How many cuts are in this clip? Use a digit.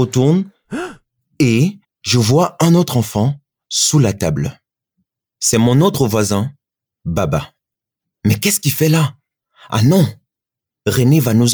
0